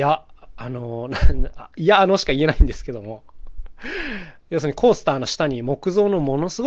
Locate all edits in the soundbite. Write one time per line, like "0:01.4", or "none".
none